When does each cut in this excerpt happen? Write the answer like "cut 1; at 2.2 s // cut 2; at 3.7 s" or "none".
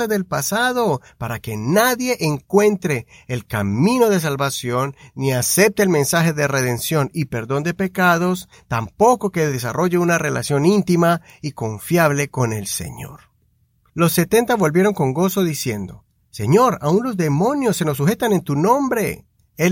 cut 1; at 13.9 s

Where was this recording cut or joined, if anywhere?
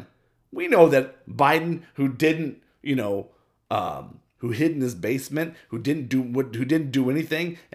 cut 1; at 4.4 s

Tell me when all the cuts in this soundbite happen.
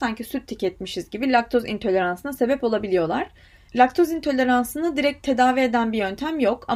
none

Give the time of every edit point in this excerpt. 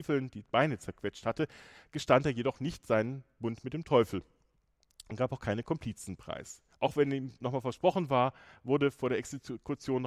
cut 1; at 6.7 s

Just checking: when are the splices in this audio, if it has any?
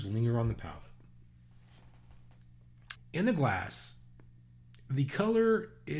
cut 1; at 3.0 s

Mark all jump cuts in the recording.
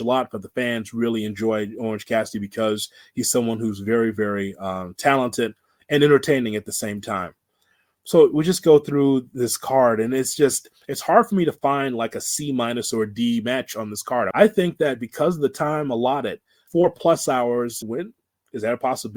cut 1; at 14.3 s // cut 2; at 16.7 s // cut 3; at 17.8 s

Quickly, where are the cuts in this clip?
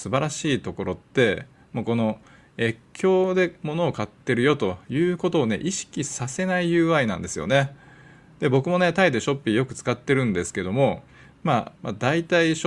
cut 1; at 11.8 s

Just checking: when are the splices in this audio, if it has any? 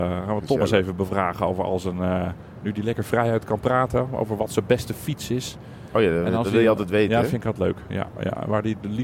none

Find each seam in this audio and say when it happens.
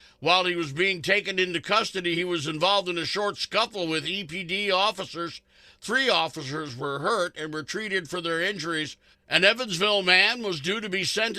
cut 1; at 9.1 s

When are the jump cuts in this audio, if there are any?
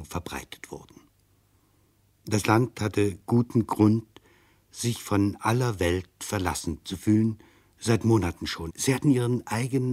cut 1; at 8.7 s

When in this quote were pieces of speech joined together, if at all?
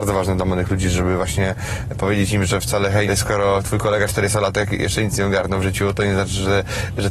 cut 1; at 3.1 s

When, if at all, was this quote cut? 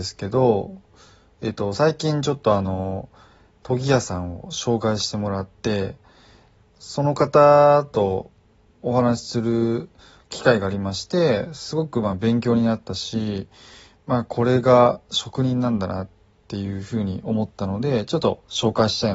none

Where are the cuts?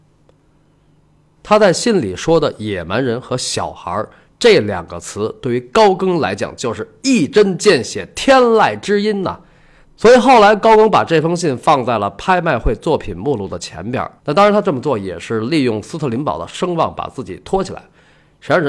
cut 1; at 1.4 s // cut 2; at 9.8 s // cut 3; at 14.2 s

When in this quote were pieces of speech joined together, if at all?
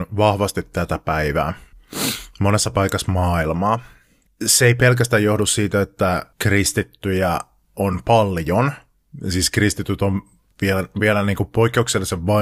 cut 1; at 4.3 s // cut 2; at 6.3 s

